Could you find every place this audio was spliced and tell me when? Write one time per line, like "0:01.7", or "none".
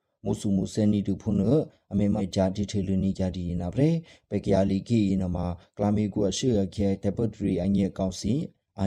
0:02.2